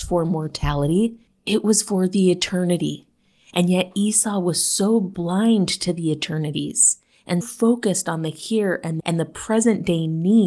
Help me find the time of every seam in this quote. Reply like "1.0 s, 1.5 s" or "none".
7.4 s, 9.0 s